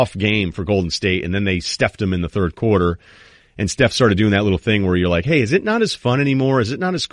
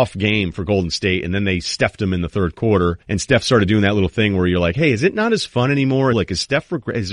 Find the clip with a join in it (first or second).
second